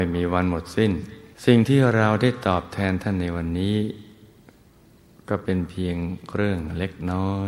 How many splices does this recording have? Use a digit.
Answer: 1